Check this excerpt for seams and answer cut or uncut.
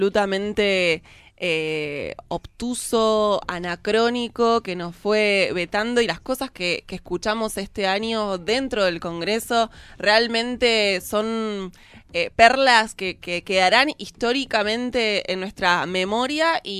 uncut